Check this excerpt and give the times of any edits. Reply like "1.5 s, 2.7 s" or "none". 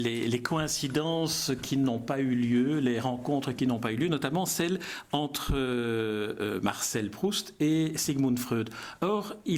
none